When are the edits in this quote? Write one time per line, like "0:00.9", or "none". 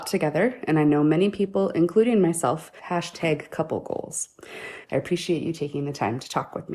0:02.8
0:04.8